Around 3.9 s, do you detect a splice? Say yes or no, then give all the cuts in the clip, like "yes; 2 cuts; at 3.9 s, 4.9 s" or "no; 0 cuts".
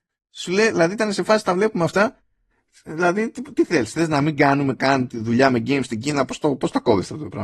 no; 0 cuts